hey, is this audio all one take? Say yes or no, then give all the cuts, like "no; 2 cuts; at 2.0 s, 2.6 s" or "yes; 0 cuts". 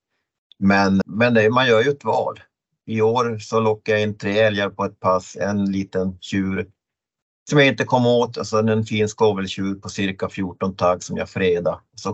no; 1 cut; at 1.0 s